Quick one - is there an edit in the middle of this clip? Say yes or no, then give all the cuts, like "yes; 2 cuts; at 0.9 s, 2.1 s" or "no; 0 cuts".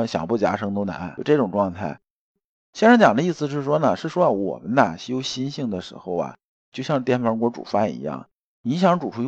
no; 0 cuts